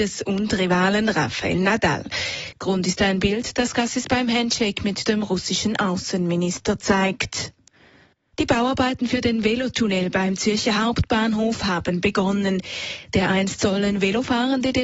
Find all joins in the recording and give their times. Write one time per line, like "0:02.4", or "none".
0:02.5